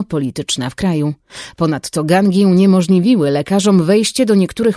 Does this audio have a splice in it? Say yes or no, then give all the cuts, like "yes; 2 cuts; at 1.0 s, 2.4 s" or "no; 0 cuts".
no; 0 cuts